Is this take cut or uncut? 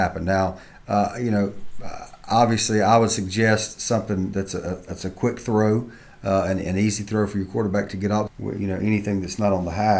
cut